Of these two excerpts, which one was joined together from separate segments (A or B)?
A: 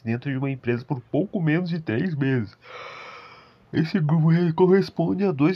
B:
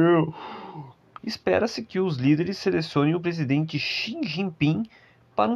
B